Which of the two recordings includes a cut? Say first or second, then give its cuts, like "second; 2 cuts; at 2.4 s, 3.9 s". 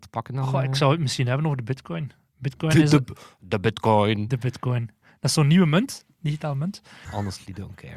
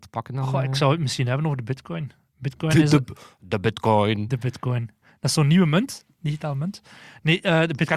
first; 1 cut; at 7.1 s